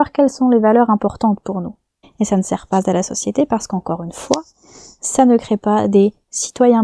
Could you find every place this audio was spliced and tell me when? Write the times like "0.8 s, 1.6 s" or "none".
2.0 s